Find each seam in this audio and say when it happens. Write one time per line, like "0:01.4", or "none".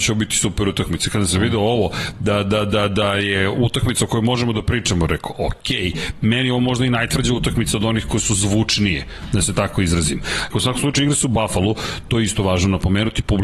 0:10.5